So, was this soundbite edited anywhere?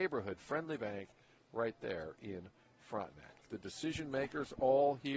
yes; 1 cut; at 3.4 s

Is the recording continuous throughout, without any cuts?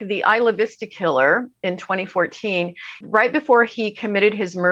no; 1 cut; at 3.0 s

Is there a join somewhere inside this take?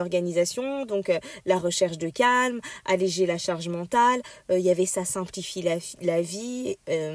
no; 0 cuts

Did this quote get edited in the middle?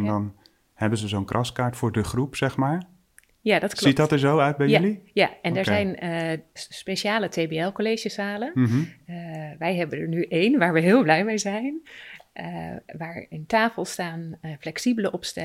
yes; 1 cut; at 6.6 s

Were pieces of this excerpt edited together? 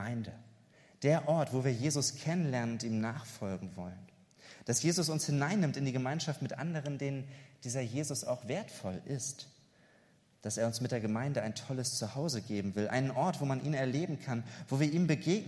no; 0 cuts

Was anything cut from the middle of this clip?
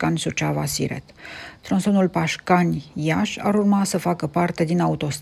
no; 0 cuts

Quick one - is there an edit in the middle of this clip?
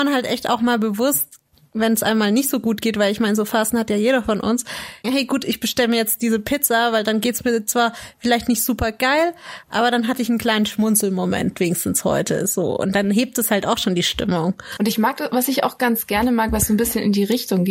yes; 2 cuts; at 5.0 s, 14.8 s

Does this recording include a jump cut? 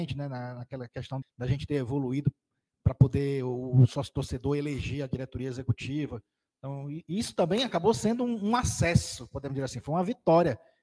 yes; 1 cut; at 1.2 s

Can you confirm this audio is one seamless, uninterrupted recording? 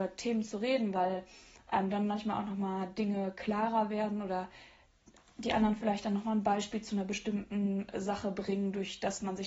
yes; 0 cuts

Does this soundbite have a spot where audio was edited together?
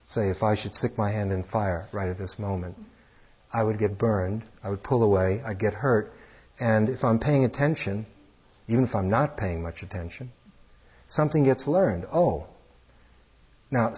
no; 0 cuts

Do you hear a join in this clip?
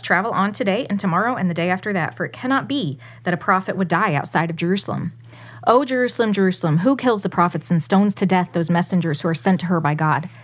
no; 0 cuts

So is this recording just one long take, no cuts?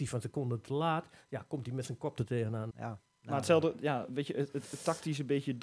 no; 1 cut; at 2.7 s

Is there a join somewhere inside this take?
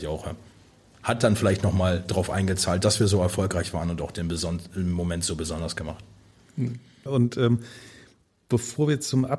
yes; 1 cut; at 7.1 s

